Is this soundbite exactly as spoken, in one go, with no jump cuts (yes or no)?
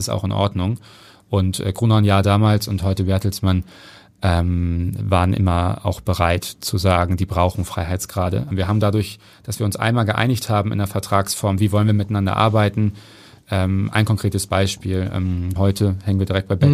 no